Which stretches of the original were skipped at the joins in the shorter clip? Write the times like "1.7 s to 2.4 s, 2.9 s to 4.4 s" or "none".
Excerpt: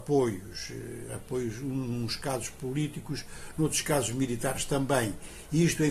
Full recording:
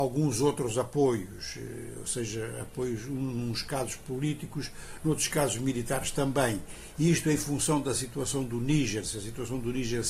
1.9 s to 2.5 s